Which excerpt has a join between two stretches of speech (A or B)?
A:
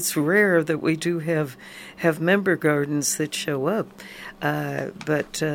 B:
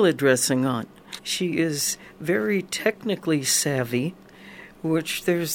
B